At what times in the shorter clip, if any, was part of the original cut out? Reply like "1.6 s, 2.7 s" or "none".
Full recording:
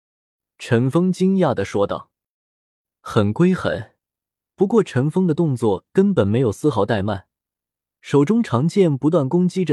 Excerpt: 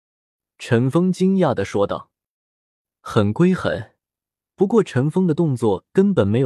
none